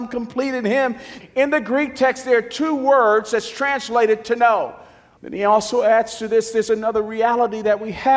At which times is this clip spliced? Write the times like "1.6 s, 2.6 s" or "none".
1.2 s, 5.2 s